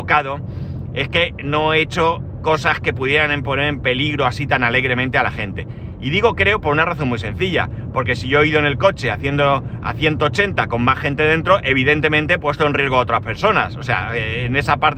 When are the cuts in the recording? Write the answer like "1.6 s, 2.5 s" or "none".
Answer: none